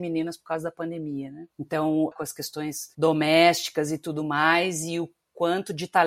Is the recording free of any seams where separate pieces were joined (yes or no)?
no